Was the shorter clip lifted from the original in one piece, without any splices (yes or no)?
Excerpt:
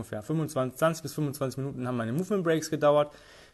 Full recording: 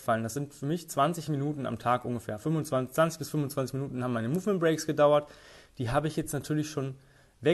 yes